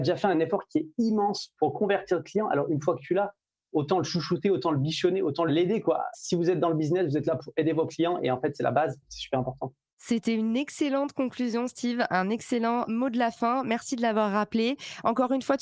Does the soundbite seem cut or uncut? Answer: uncut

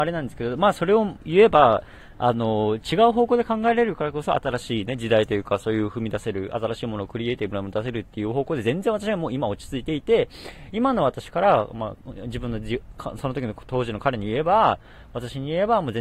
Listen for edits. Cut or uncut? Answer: uncut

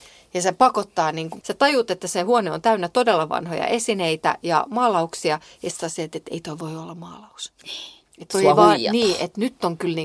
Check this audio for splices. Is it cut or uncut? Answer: cut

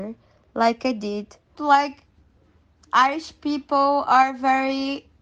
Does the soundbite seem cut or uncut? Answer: cut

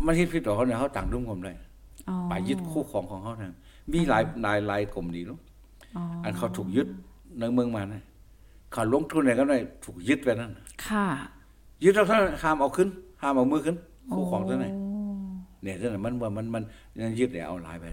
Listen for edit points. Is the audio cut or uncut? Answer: uncut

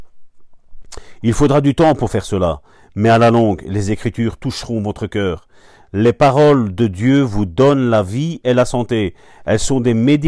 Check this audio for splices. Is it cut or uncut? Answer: uncut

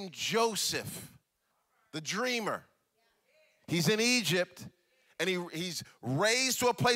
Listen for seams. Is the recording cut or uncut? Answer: uncut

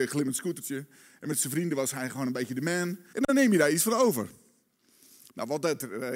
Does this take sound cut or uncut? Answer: cut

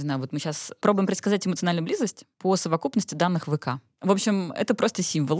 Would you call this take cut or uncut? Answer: cut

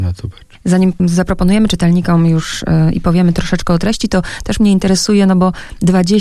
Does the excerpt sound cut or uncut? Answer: uncut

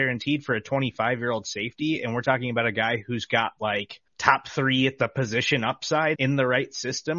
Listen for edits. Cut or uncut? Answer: cut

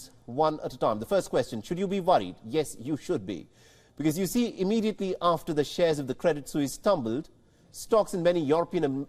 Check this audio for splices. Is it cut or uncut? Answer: uncut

